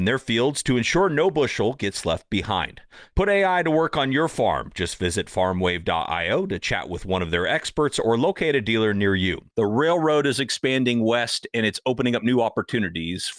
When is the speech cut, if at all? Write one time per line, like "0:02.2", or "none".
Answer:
0:09.5